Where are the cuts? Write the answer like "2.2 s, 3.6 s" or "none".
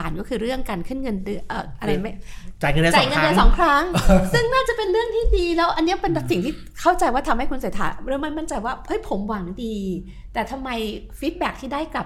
none